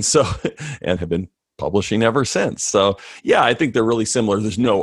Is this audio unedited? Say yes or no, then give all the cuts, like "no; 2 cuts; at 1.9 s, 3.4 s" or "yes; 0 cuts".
no; 1 cut; at 1.0 s